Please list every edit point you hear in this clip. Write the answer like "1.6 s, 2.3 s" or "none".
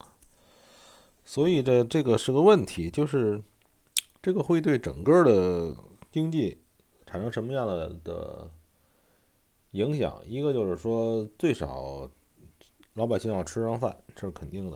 none